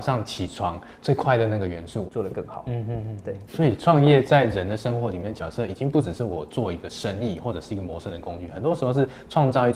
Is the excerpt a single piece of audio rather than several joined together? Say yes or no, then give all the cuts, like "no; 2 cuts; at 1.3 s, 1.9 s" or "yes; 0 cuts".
no; 2 cuts; at 2.0 s, 3.5 s